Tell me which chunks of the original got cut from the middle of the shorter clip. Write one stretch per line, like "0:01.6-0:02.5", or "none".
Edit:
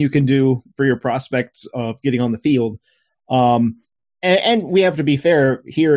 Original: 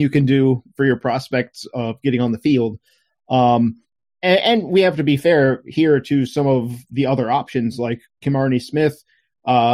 none